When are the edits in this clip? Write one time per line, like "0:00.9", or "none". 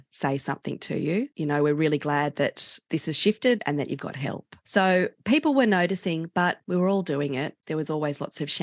0:03.6
0:07.6